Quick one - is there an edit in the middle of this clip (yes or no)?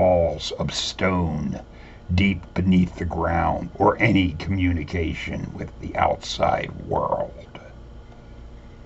yes